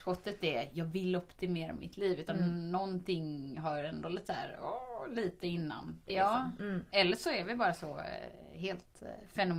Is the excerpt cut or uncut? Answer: cut